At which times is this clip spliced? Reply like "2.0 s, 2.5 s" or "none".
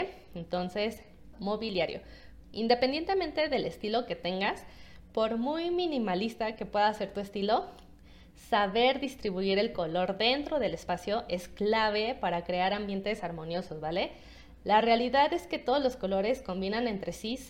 1.3 s, 2.4 s